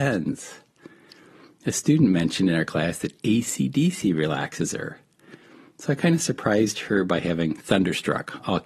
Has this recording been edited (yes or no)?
no